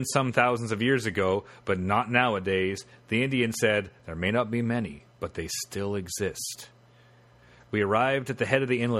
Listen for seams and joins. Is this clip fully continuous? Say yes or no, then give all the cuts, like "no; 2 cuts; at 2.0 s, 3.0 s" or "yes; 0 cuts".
yes; 0 cuts